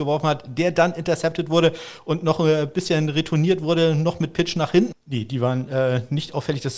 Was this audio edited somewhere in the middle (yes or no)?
yes